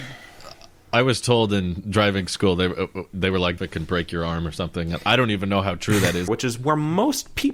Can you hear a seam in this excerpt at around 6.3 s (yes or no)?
yes